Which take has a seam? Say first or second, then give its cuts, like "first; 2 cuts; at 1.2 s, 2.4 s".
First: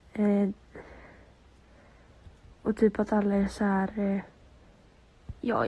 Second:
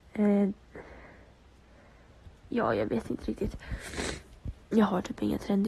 second; 1 cut; at 2.5 s